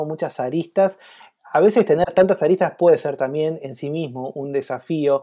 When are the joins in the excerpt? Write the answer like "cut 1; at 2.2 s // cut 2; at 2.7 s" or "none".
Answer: none